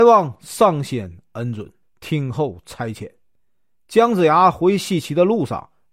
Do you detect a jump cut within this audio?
yes; 1 cut; at 1.8 s

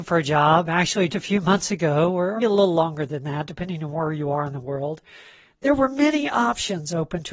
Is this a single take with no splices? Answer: no; 2 cuts; at 1.1 s, 2.4 s

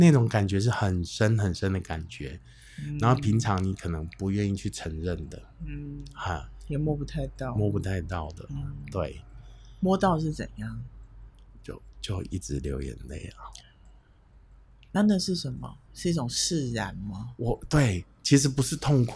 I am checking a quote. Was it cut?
no; 0 cuts

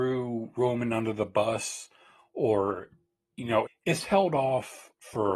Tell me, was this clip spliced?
yes; 1 cut; at 3.7 s

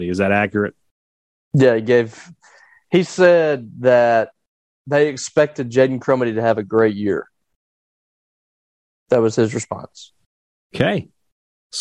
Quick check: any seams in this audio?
no; 0 cuts

